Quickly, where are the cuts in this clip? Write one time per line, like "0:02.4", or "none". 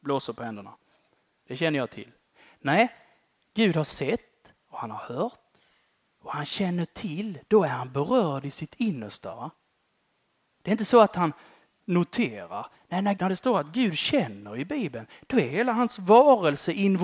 0:13.2